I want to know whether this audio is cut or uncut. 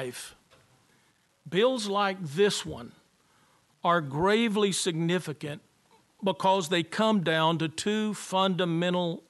uncut